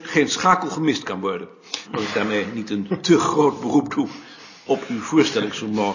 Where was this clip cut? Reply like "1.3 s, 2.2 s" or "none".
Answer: 1.8 s